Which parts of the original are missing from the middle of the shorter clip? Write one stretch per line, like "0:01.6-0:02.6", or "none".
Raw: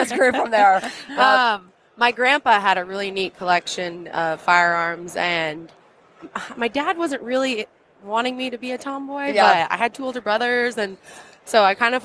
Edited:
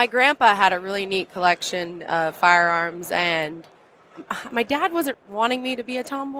0:07.2-0:07.9